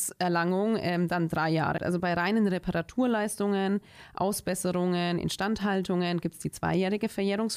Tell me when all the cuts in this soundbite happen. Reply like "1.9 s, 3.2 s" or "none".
1.8 s